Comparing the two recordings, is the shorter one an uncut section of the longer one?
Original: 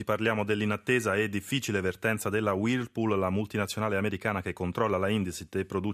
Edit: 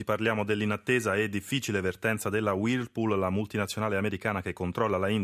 yes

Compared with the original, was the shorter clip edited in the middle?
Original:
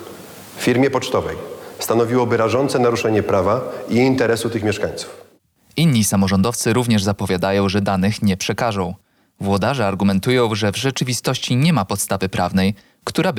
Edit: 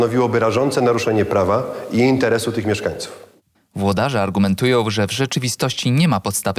yes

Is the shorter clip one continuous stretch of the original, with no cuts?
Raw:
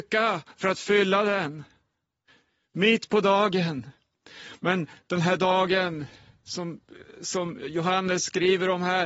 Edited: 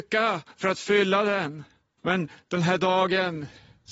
no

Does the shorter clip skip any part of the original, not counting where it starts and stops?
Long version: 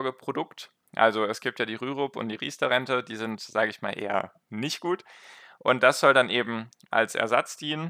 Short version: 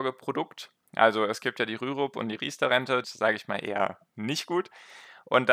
yes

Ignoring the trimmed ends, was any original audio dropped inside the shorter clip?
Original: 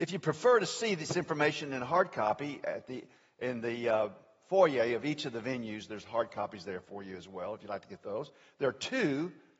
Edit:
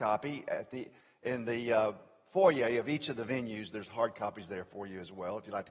no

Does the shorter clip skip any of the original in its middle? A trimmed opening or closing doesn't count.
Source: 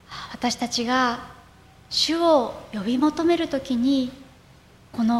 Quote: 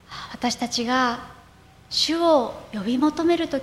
no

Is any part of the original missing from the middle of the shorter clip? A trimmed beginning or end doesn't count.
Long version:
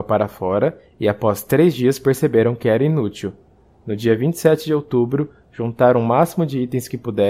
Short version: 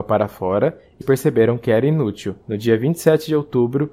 yes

